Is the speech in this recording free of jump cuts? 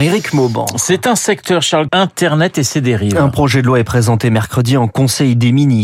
no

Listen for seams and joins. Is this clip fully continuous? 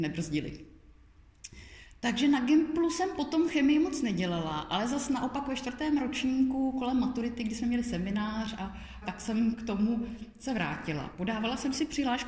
no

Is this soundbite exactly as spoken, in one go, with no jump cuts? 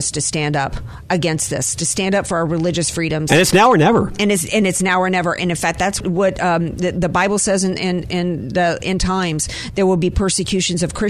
no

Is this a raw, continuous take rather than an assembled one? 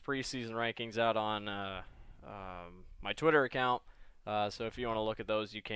yes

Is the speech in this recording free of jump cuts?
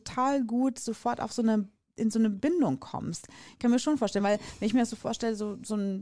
yes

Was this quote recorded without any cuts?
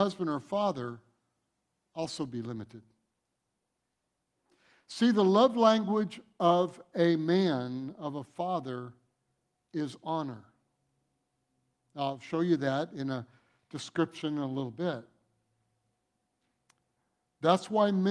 yes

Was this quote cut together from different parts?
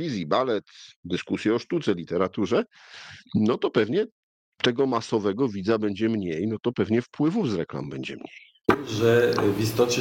no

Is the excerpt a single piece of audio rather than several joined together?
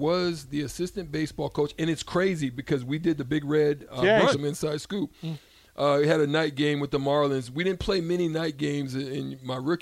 no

